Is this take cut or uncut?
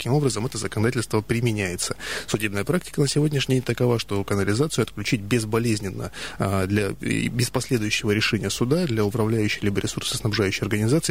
uncut